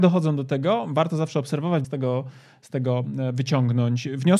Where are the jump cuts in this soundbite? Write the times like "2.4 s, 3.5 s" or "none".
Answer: 1.8 s